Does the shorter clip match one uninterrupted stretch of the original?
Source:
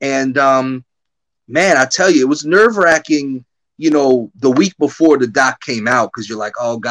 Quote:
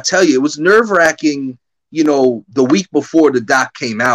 yes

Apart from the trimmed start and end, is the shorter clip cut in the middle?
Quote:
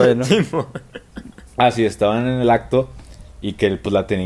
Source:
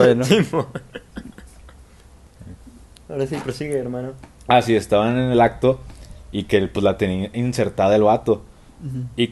yes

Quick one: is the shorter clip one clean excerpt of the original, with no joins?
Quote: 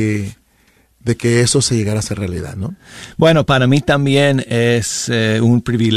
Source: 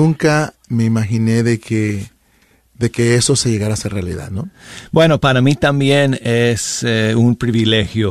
yes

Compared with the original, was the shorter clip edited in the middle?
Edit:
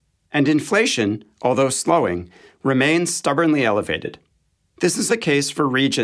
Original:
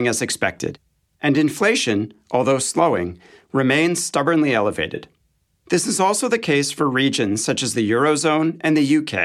yes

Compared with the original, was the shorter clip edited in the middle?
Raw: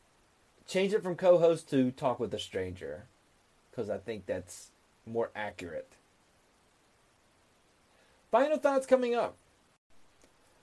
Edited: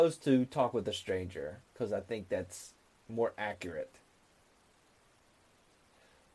yes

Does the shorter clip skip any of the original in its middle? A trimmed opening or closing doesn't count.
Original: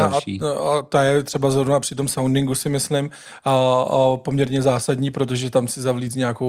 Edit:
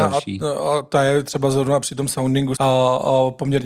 yes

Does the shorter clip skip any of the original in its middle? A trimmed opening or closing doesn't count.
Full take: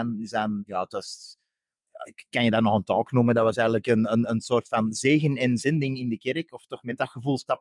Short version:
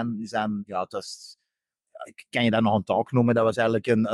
no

